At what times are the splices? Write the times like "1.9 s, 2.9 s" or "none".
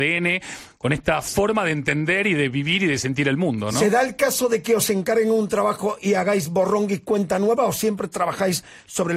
none